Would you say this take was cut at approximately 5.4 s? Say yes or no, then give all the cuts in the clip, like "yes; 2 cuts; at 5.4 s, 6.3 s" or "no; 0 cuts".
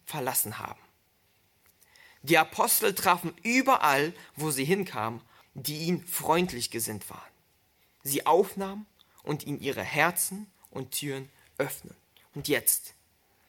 yes; 1 cut; at 5.4 s